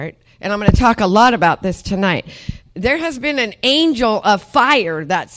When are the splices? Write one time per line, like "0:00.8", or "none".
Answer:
none

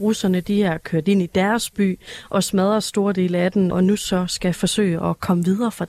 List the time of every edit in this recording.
0:03.7

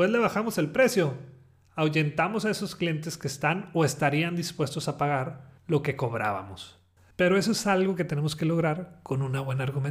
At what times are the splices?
0:07.1

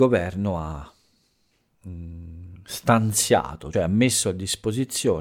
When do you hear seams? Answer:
0:03.7

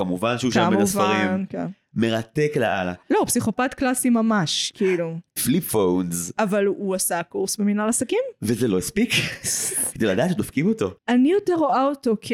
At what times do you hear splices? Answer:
0:05.4
0:11.0

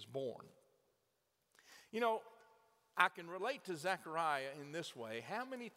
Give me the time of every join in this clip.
none

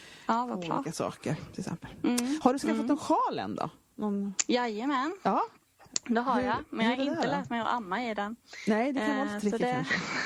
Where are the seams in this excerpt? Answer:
none

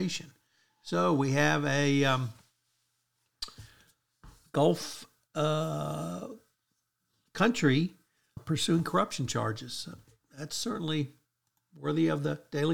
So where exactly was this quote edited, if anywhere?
0:08.4

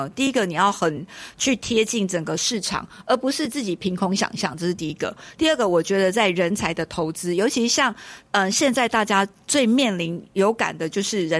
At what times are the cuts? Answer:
none

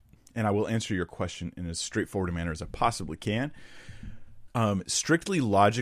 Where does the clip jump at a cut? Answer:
0:04.5

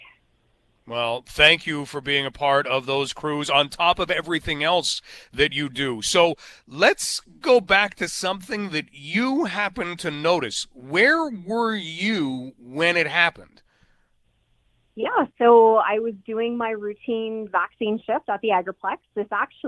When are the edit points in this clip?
none

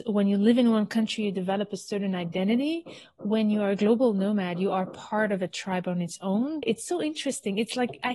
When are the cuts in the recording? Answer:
0:06.6

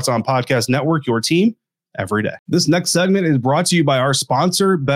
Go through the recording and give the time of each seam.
0:02.4

